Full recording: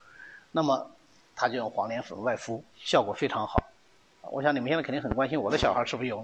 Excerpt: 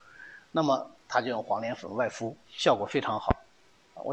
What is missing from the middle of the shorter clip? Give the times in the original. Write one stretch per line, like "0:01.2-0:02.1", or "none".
0:01.0-0:01.3